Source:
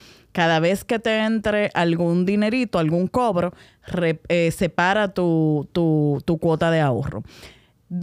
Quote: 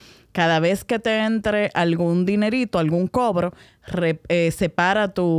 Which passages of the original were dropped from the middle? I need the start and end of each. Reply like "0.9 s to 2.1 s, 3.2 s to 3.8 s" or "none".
none